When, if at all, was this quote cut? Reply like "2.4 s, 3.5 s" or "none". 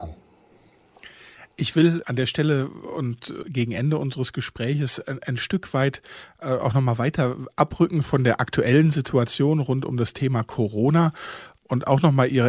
none